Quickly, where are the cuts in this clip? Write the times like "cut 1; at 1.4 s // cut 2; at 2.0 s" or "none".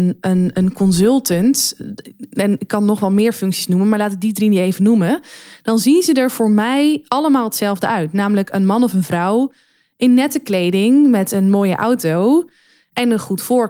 none